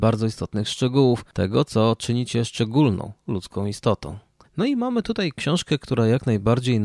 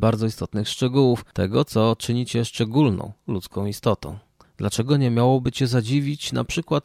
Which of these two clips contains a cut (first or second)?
first